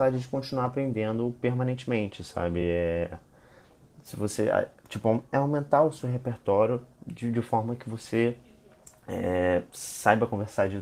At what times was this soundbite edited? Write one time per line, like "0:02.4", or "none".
none